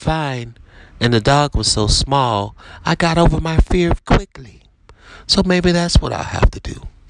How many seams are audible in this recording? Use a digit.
1